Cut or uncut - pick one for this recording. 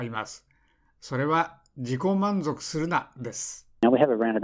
uncut